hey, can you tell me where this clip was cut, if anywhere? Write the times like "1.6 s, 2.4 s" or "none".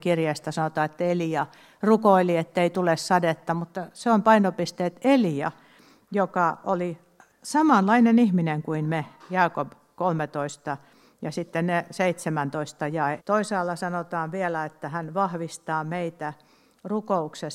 13.2 s